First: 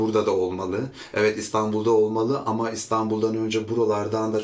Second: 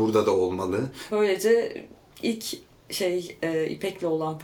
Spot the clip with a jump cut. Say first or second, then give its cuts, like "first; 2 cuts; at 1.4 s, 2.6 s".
second; 1 cut; at 1.1 s